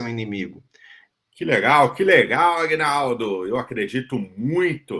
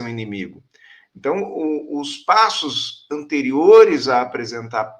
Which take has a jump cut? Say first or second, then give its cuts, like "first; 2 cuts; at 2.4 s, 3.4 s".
first; 1 cut; at 1.1 s